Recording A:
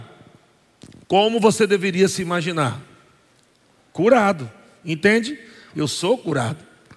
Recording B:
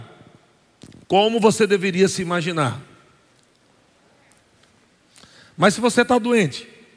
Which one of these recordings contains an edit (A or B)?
A